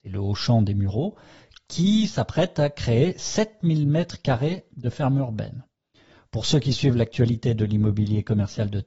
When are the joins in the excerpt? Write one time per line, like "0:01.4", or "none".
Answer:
none